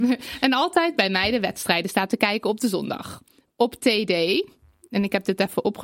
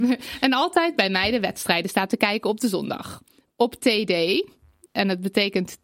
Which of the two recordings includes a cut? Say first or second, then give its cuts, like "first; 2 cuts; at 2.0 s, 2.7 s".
second; 1 cut; at 4.9 s